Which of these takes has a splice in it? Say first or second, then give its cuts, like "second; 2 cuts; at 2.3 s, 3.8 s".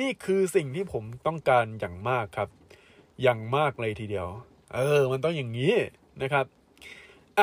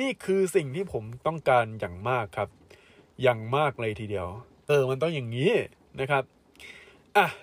second; 1 cut; at 4.7 s